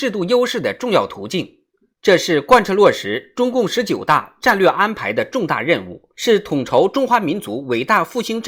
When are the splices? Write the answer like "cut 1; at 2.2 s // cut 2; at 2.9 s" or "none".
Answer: cut 1; at 1.9 s // cut 2; at 6.1 s